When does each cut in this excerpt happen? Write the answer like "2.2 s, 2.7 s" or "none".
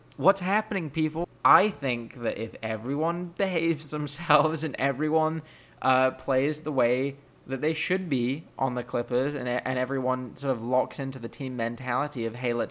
1.2 s